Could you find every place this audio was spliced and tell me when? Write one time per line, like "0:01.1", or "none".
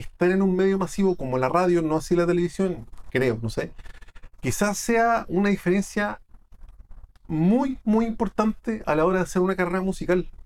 none